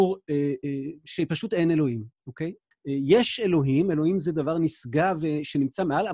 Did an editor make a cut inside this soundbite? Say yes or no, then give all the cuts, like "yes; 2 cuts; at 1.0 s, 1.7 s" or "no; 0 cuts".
yes; 1 cut; at 2.7 s